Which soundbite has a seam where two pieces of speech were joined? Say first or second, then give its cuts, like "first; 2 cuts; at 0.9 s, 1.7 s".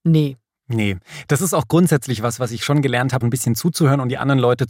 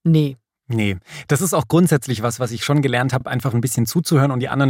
first; 1 cut; at 3.2 s